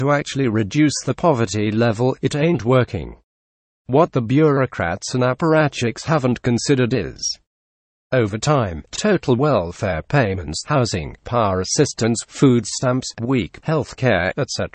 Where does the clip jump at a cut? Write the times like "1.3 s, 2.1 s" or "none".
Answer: 13.2 s